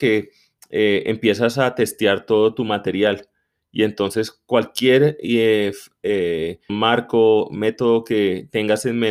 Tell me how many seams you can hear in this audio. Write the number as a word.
one